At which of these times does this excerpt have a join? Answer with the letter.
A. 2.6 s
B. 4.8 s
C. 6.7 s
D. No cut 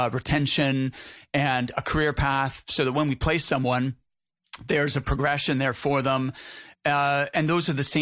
C